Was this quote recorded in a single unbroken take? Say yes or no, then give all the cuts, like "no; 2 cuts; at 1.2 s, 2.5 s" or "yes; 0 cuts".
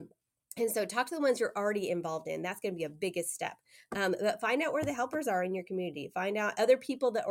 yes; 0 cuts